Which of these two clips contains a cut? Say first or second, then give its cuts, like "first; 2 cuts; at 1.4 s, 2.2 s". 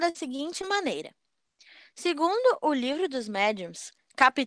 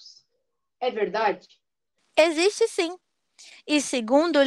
second; 1 cut; at 2.0 s